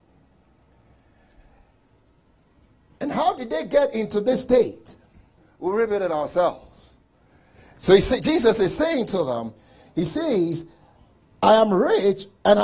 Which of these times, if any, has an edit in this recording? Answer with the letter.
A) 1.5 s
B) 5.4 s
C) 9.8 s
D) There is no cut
B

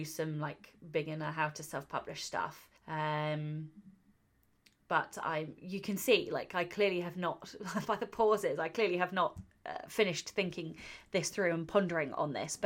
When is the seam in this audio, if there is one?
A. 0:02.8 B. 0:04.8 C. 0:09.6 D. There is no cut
A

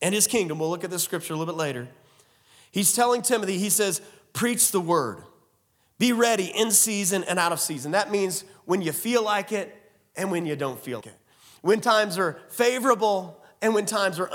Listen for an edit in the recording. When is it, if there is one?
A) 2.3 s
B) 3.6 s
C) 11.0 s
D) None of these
C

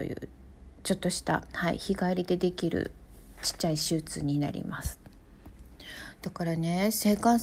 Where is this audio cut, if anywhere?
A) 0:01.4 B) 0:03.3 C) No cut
C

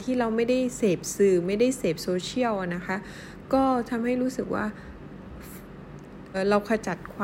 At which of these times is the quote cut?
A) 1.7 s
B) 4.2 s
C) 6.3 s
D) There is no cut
C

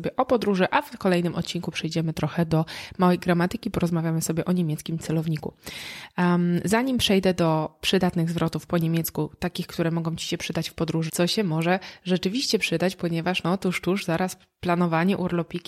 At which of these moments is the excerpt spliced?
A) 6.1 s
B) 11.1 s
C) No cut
B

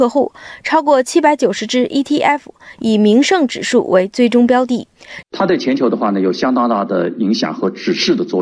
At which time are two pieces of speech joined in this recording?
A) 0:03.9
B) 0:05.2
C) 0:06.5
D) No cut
B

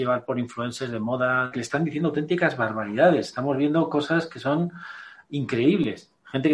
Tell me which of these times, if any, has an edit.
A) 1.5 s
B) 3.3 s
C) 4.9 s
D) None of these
A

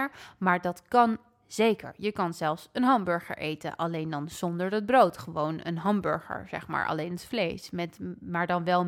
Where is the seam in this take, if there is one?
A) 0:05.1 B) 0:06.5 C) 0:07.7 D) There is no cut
D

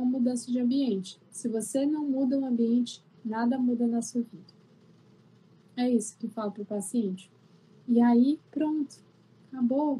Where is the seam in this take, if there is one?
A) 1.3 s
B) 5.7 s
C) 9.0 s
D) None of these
D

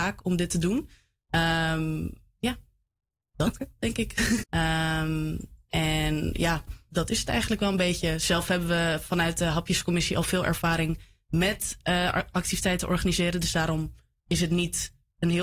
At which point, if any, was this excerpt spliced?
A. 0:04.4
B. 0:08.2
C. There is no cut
A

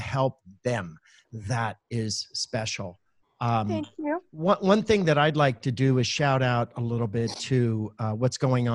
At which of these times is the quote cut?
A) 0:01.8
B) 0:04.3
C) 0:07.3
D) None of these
A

